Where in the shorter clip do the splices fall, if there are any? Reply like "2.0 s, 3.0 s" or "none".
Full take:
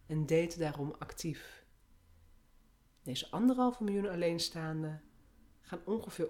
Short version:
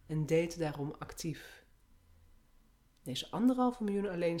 none

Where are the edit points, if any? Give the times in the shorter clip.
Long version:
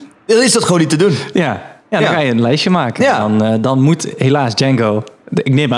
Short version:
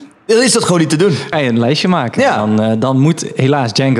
1.3 s

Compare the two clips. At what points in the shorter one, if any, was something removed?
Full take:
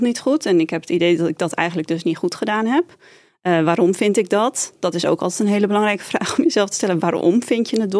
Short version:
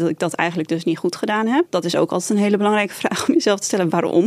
1.7 s

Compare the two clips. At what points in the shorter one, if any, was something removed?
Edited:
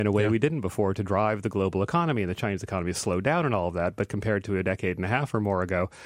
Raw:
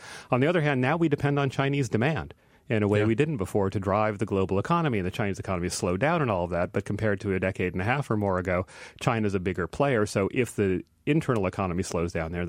none

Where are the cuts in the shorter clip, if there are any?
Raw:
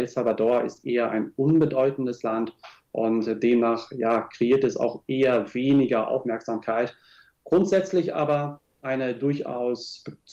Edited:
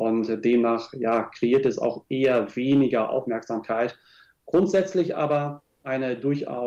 none

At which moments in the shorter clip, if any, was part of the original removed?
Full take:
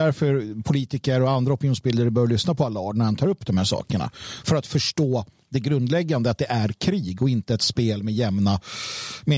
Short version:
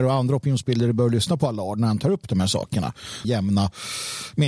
3.2 s

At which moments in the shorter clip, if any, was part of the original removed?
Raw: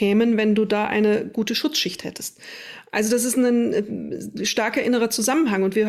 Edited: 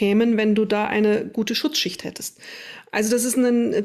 none

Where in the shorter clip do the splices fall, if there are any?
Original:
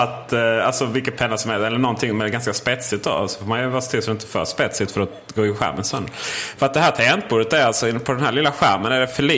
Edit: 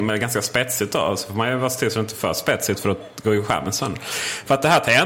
none

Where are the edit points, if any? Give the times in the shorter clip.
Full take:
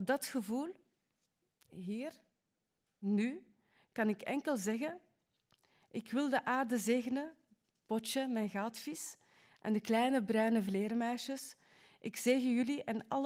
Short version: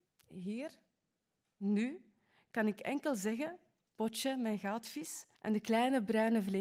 3.9 s, 5.3 s

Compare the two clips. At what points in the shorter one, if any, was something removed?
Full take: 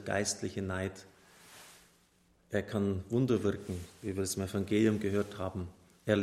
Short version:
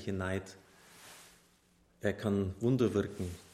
none

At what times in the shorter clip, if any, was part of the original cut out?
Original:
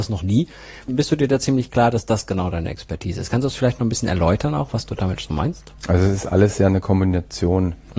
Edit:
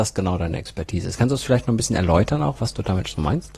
none

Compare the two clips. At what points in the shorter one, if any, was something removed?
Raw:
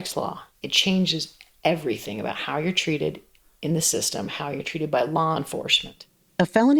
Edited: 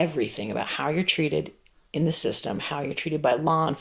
none

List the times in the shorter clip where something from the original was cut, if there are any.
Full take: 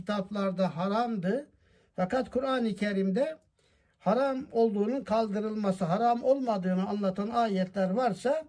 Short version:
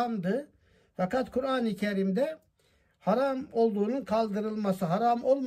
none

